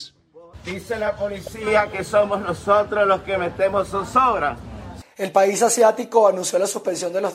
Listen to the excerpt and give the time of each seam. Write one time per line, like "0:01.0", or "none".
0:05.0

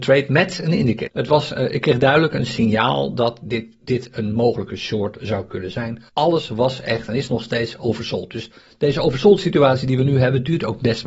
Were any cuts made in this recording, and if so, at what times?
0:01.1
0:06.1

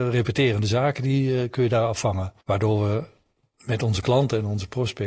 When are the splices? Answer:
0:02.4

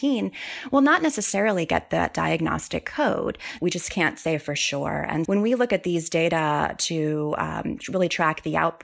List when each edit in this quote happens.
0:03.6
0:05.2

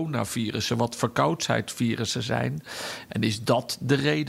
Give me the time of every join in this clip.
0:03.1

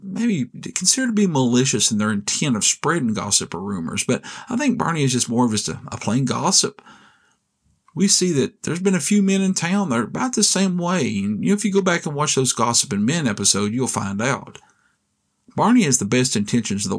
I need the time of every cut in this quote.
none

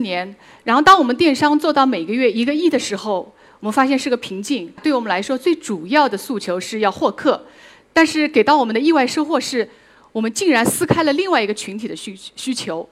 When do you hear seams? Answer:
0:04.8

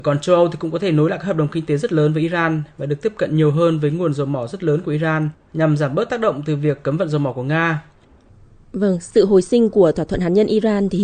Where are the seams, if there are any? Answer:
none

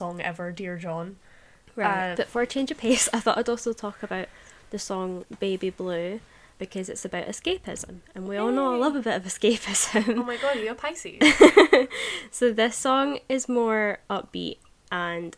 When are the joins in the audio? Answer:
0:02.1

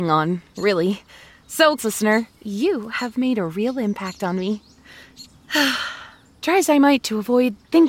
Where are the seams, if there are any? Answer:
0:01.8
0:05.2

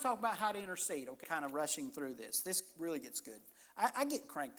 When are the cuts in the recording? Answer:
0:01.2

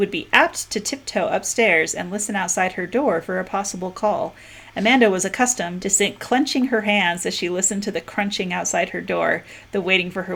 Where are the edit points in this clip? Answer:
0:05.8

